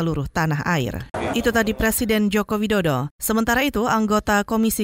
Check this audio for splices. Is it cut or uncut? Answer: cut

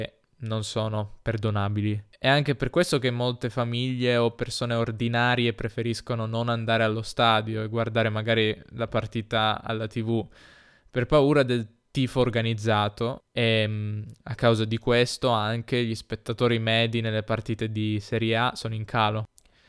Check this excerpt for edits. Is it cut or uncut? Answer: uncut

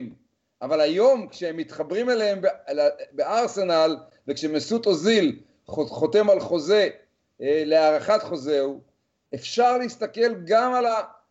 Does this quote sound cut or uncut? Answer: uncut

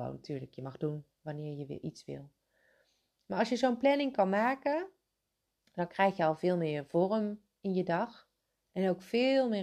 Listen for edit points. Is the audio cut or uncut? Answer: uncut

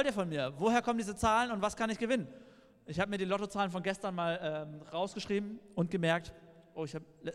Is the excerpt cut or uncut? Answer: uncut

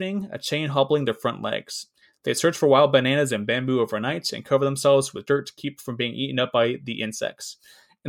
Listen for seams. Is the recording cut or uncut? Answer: uncut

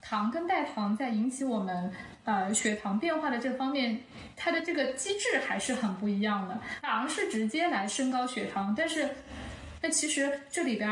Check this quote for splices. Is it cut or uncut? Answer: cut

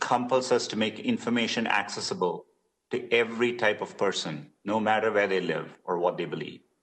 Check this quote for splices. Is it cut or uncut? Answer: uncut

